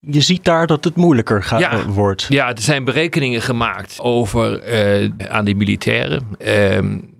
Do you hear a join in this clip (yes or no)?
yes